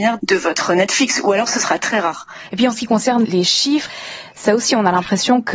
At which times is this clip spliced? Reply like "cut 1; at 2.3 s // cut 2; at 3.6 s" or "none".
cut 1; at 1.8 s